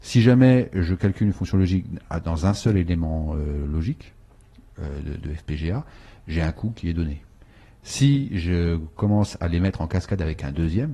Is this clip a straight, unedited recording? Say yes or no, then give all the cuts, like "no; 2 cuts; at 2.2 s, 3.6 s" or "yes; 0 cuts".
yes; 0 cuts